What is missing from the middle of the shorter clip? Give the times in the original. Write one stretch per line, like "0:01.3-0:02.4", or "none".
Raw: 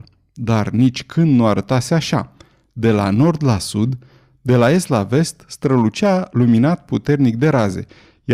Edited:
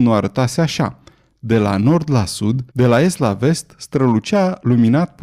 0:04.0-0:04.4

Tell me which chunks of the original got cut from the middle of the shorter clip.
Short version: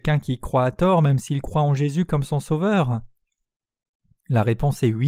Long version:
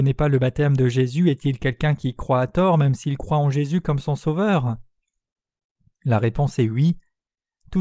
none

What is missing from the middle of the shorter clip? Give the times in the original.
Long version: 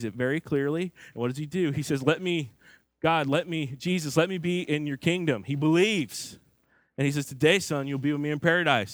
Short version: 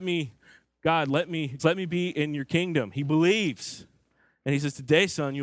0:03.8-0:04.1

